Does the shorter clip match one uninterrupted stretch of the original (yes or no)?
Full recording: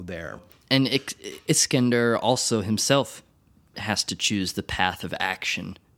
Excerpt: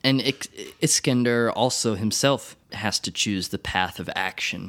no